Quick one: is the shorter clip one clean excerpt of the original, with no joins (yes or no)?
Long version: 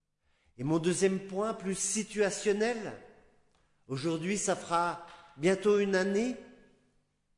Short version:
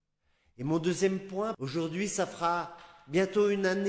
no